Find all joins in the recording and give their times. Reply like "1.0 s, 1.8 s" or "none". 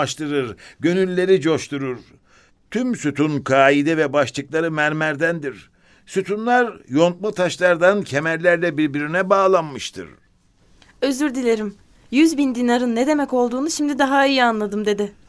none